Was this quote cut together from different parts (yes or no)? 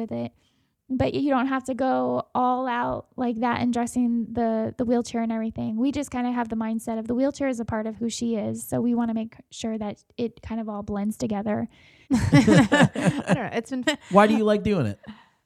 yes